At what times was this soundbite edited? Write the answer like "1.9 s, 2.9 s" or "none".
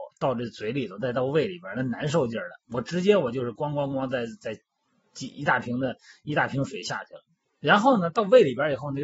none